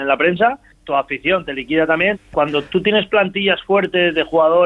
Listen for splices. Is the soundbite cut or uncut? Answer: cut